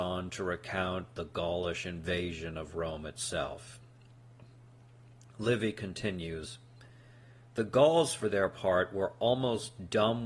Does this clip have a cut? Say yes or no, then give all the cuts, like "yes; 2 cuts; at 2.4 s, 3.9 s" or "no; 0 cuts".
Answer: no; 0 cuts